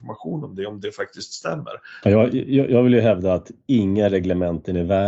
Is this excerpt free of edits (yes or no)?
no